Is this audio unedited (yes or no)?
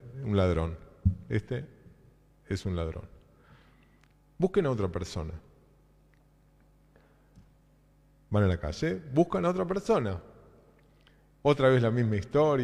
yes